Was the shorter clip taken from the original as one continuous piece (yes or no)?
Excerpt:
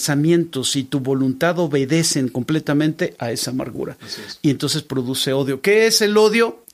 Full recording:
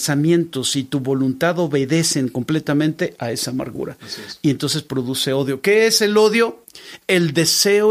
yes